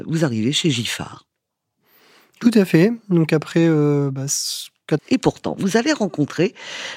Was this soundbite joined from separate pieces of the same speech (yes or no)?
yes